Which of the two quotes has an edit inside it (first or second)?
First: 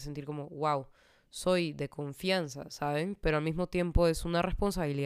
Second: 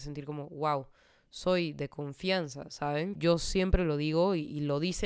second